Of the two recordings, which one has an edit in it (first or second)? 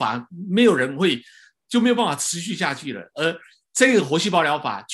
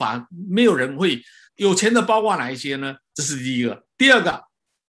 second